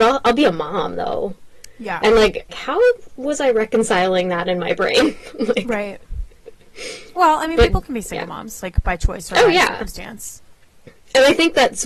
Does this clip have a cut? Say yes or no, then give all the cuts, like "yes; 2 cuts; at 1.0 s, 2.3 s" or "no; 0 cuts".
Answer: yes; 1 cut; at 2.5 s